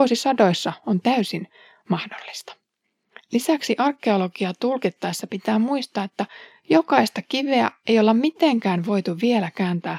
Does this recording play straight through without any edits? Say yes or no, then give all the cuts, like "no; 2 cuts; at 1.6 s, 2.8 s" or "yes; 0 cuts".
yes; 0 cuts